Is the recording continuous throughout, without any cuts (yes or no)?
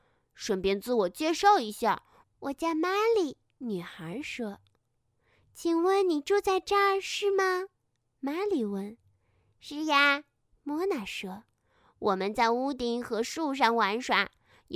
no